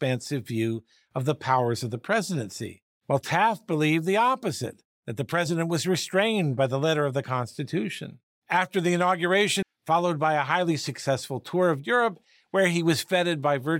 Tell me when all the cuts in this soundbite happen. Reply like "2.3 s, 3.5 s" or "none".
8.4 s, 9.6 s